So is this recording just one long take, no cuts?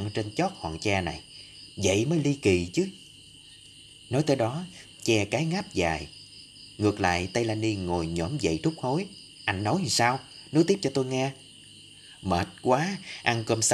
no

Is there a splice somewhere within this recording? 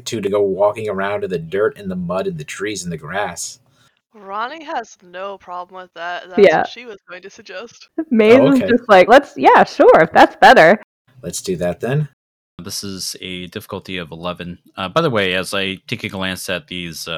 yes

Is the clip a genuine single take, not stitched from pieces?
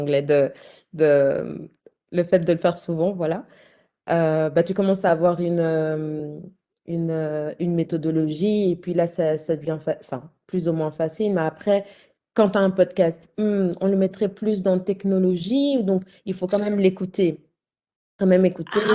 yes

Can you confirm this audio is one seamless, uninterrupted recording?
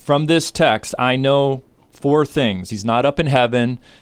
no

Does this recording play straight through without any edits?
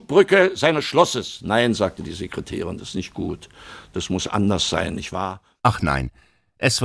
no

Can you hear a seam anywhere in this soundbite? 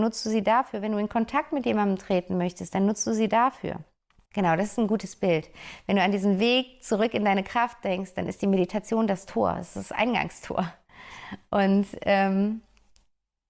yes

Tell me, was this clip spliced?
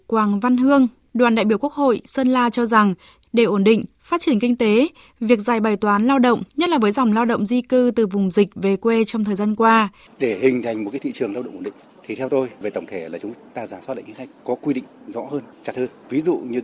yes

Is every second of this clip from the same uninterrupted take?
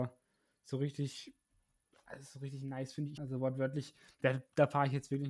no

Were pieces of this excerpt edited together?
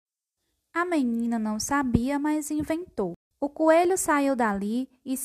yes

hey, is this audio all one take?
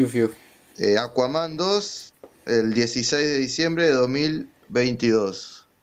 yes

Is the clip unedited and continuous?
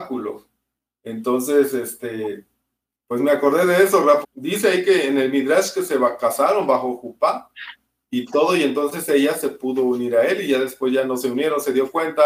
no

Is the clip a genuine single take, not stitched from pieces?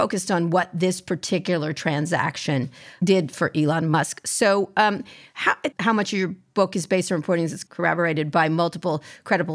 no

